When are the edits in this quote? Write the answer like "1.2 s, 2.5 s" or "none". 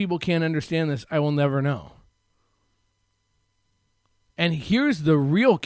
none